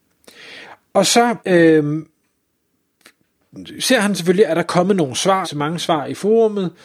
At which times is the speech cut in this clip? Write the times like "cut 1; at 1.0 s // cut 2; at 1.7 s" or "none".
cut 1; at 1.4 s // cut 2; at 5.4 s